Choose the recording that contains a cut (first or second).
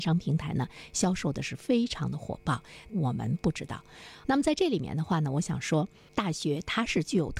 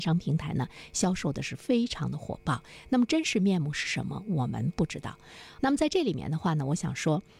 first